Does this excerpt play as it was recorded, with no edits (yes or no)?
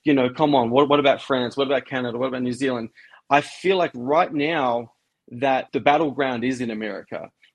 no